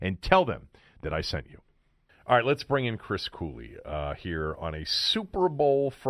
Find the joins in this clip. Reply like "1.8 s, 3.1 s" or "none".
none